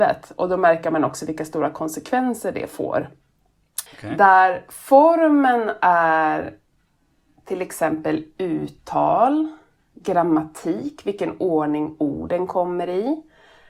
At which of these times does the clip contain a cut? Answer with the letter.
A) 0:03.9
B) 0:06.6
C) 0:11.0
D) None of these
A